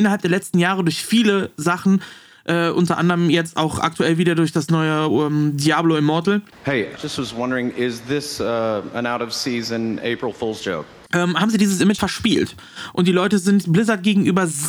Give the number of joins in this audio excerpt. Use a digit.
2